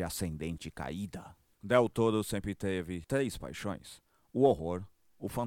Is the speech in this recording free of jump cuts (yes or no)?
yes